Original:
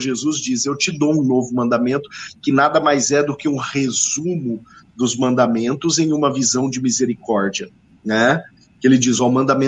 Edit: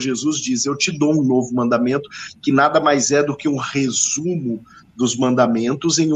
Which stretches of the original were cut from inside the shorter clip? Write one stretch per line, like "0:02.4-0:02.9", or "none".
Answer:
none